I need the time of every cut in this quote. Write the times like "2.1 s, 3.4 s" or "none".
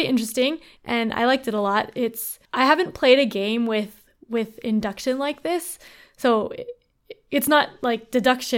2.4 s